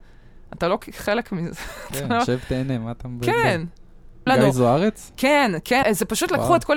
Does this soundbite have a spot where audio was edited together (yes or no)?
yes